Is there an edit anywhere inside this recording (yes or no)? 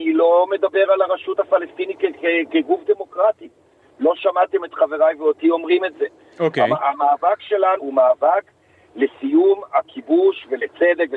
yes